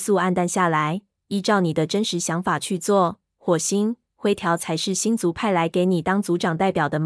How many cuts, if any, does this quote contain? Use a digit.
1